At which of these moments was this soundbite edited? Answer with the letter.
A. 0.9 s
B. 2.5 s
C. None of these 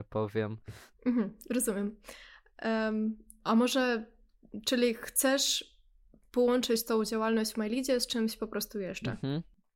A